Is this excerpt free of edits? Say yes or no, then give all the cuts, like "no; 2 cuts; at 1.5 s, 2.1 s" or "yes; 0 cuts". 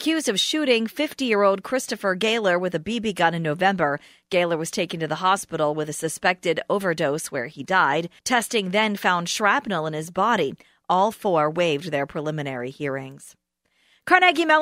no; 1 cut; at 8.2 s